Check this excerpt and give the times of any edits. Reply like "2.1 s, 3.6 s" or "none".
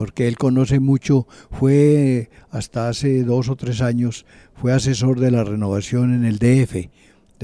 none